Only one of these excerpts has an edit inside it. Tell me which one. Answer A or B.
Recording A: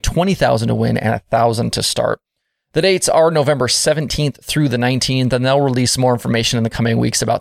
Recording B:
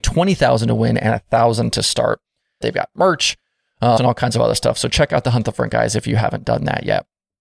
B